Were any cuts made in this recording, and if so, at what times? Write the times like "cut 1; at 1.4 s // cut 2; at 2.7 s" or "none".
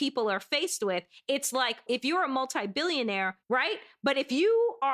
cut 1; at 1.9 s // cut 2; at 3.4 s

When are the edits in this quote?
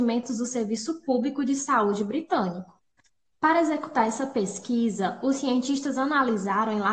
cut 1; at 3.3 s

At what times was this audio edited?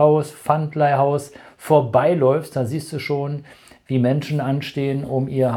none

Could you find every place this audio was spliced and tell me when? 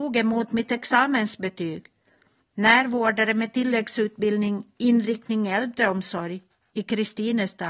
none

